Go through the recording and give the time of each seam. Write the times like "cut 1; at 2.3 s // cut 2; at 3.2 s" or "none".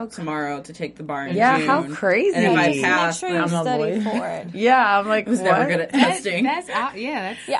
cut 1; at 5.9 s